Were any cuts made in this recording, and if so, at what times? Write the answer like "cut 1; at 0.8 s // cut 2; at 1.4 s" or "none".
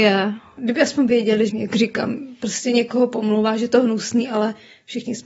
cut 1; at 1.5 s